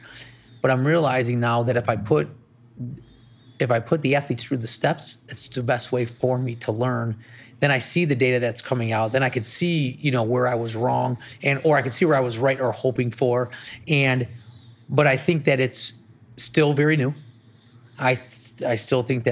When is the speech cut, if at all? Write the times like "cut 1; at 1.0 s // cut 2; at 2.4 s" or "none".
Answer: none